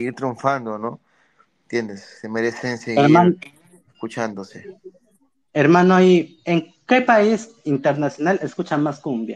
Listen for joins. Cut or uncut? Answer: uncut